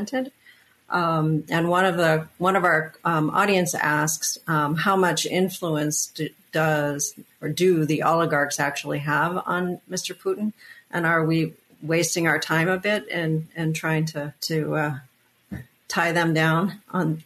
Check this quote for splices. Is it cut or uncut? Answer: cut